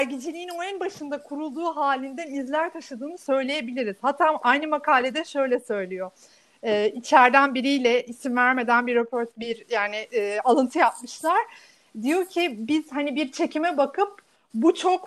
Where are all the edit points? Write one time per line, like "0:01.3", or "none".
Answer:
none